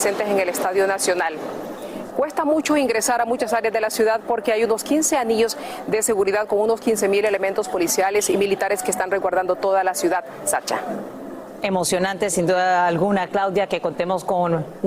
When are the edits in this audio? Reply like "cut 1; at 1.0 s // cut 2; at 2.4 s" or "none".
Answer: cut 1; at 2.1 s